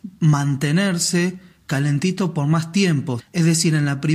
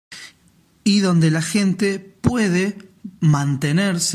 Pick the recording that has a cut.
first; 1 cut; at 3.2 s

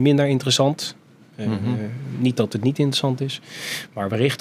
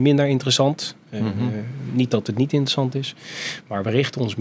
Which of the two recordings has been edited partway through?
second; 1 cut; at 1.0 s

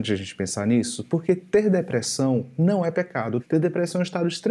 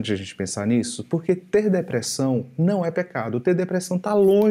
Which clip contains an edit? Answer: first; 1 cut; at 3.4 s

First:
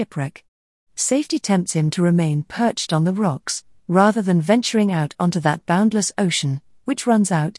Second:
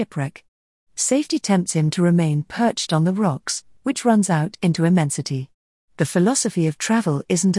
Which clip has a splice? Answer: second; 2 cuts; at 3.8 s, 5.8 s

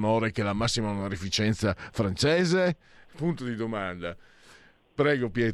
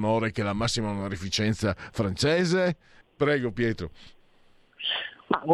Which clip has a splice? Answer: second; 1 cut; at 3.0 s

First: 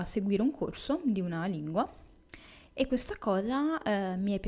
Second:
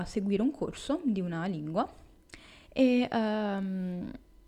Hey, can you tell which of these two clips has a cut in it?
second; 1 cut; at 2.6 s

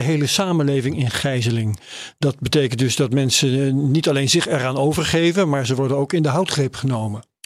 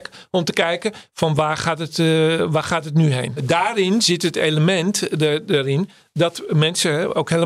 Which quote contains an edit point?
second; 1 cut; at 3.4 s

